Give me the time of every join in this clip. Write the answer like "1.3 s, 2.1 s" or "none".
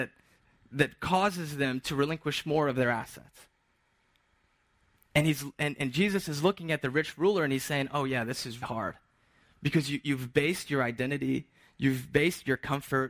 5.0 s, 8.6 s